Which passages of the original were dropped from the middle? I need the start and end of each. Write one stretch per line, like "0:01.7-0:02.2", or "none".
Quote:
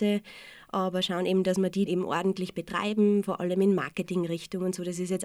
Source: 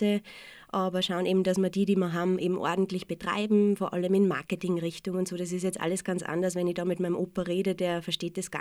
0:01.9-0:02.4